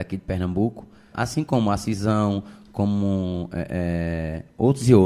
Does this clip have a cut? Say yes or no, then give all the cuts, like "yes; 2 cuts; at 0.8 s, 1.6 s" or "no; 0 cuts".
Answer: yes; 1 cut; at 1.1 s